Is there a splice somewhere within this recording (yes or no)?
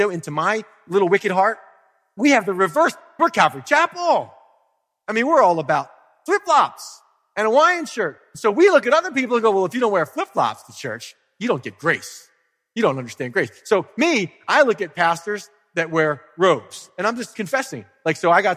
no